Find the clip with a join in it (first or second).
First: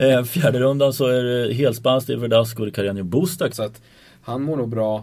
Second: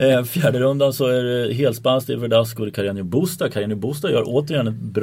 first